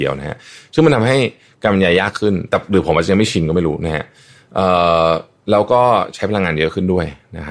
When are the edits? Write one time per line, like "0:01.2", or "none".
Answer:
none